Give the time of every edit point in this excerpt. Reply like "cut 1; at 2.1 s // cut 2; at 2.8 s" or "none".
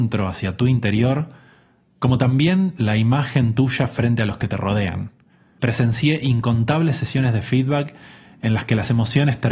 none